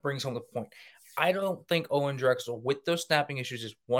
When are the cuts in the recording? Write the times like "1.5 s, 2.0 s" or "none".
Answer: none